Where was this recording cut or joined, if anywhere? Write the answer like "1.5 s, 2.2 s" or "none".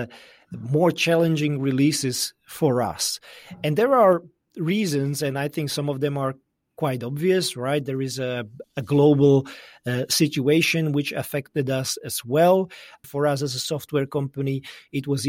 8.6 s, 13.0 s